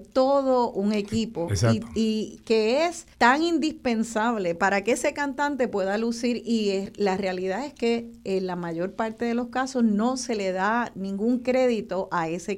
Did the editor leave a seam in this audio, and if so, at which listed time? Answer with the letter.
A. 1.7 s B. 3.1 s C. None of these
B